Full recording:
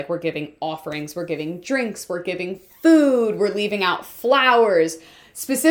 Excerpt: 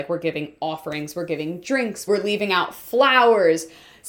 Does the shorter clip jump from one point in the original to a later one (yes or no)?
yes